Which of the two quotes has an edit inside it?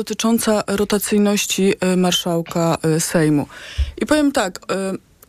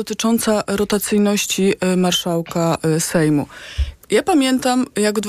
second; 1 cut; at 3.9 s

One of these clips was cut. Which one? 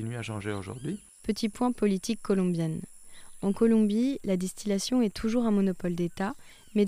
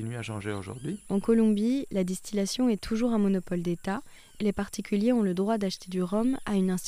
second; 2 cuts; at 1.0 s, 4.4 s

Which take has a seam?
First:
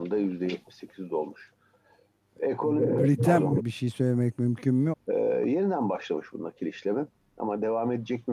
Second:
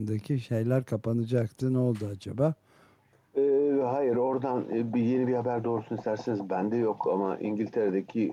first; 3 cuts; at 2.4 s, 3.6 s, 4.9 s

